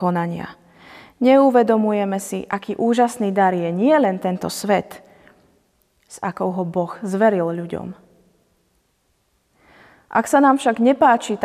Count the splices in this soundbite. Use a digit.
2